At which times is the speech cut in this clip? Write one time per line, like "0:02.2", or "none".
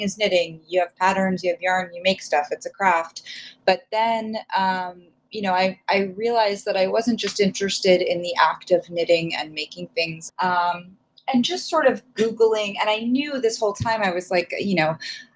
0:10.3